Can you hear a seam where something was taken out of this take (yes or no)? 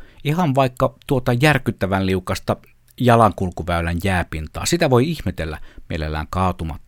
no